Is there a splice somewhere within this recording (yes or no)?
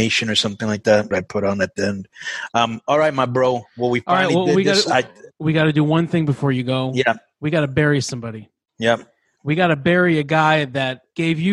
yes